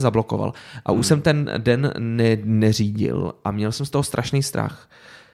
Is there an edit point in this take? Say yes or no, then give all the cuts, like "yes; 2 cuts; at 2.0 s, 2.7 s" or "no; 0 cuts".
no; 0 cuts